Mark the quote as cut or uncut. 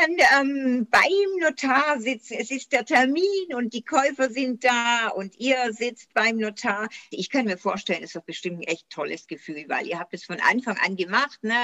cut